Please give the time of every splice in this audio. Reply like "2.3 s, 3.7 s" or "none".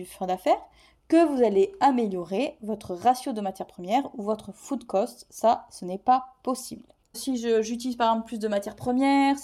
7.1 s